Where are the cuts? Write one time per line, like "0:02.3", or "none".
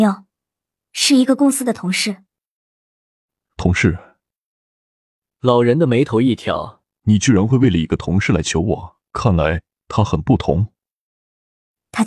0:06.9
0:09.1